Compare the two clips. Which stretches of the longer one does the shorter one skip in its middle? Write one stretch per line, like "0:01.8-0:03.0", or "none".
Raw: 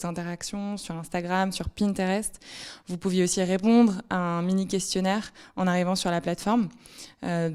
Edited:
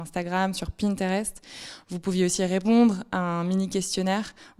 none